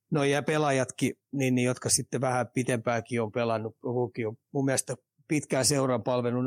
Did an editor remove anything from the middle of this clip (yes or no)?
no